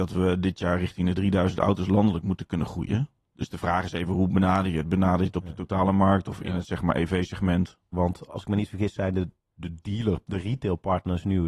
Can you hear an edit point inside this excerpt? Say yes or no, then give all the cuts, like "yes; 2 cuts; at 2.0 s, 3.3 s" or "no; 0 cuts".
yes; 1 cut; at 7.9 s